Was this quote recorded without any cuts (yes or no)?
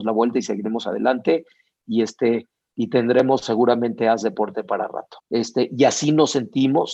no